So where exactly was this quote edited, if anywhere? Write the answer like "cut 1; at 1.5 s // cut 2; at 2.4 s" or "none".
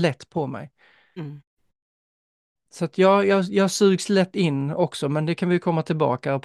none